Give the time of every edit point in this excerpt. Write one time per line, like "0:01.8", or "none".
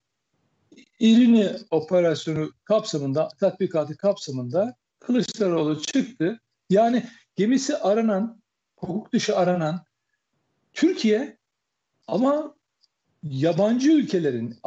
0:06.6